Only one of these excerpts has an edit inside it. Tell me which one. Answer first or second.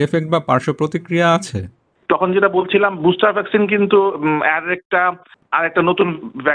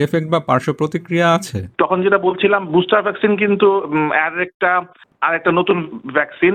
second